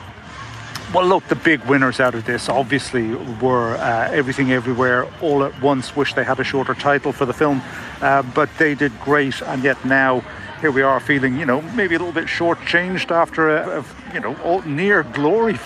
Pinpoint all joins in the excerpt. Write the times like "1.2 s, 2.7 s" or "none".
9.4 s, 13.6 s